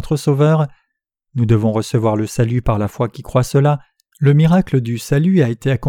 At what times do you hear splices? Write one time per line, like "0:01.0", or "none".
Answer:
0:04.1